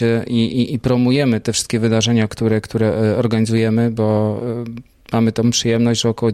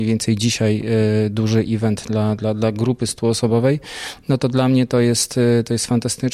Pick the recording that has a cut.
first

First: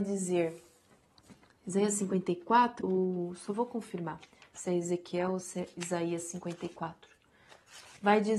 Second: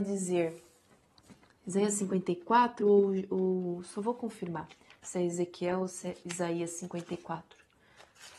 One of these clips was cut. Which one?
first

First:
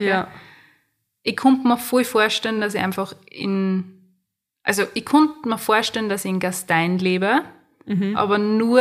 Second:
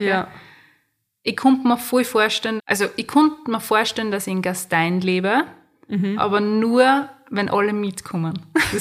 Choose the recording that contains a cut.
second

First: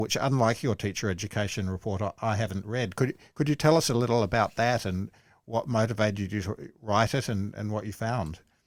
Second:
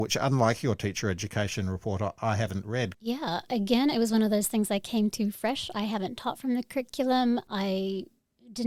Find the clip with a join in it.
second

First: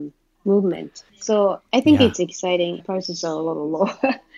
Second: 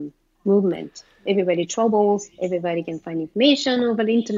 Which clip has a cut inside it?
first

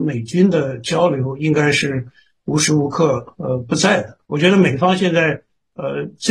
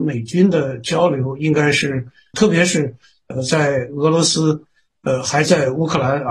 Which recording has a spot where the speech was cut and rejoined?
second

